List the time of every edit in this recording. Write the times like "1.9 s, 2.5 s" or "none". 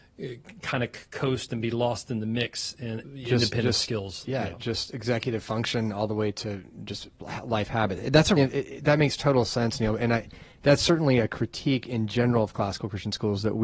3.0 s, 8.4 s